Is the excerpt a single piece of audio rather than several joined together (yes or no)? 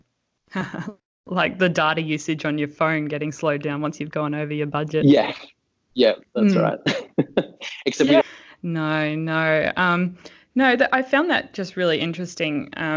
no